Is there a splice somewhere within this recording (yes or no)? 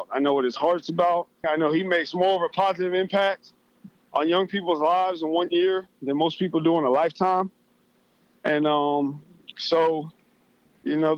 yes